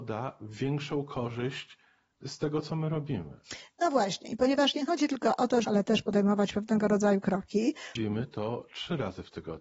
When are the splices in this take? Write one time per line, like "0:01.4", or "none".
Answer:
0:05.6
0:08.0